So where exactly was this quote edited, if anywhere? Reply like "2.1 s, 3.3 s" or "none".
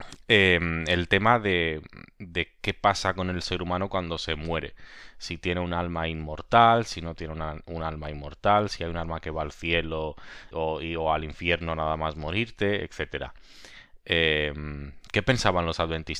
10.5 s